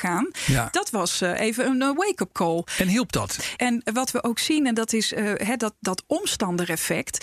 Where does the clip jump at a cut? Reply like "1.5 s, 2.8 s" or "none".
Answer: 3.6 s

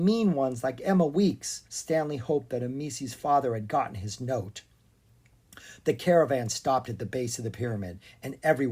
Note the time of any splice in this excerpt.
1.7 s

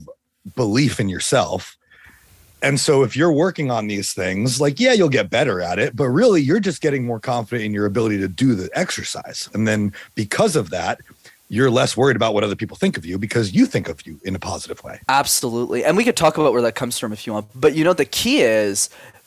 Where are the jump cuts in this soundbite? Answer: 15.0 s, 17.5 s

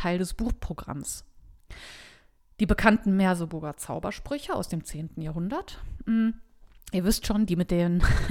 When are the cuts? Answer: none

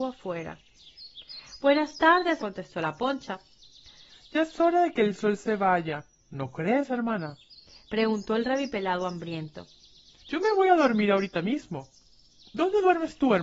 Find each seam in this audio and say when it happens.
2.4 s, 10.2 s, 12.4 s

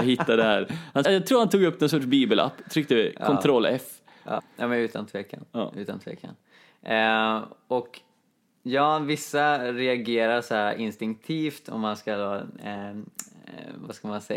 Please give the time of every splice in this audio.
1.0 s, 4.4 s

